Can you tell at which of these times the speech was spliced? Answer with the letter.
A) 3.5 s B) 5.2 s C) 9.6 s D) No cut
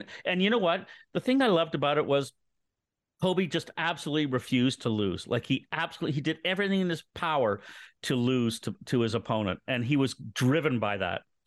D